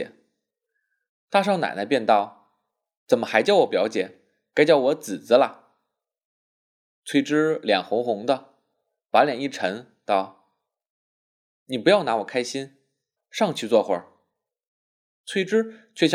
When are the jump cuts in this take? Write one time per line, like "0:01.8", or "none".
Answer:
0:13.2